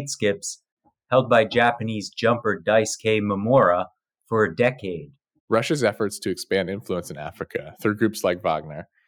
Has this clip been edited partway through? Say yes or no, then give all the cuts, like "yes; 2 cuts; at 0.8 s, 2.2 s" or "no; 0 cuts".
yes; 1 cut; at 5.4 s